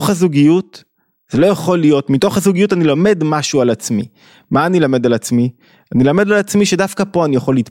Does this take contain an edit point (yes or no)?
no